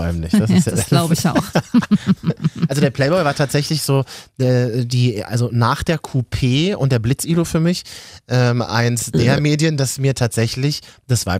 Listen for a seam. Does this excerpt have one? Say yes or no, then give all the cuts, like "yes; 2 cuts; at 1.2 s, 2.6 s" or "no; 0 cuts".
no; 0 cuts